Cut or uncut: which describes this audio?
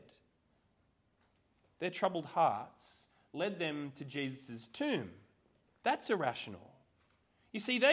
cut